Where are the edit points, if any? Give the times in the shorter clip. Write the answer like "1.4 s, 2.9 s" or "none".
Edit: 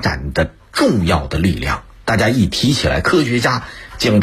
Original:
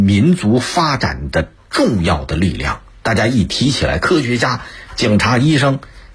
none